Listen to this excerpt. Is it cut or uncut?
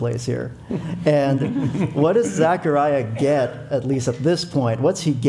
uncut